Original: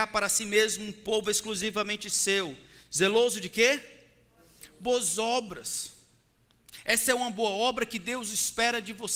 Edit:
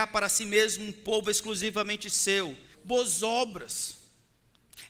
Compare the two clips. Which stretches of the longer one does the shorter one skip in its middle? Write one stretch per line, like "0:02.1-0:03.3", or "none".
0:02.7-0:04.7